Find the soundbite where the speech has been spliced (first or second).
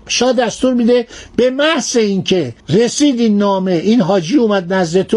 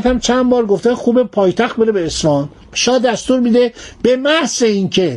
first